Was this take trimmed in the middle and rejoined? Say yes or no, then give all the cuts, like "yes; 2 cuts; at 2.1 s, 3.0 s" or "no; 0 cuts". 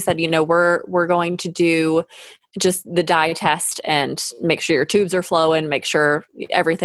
no; 0 cuts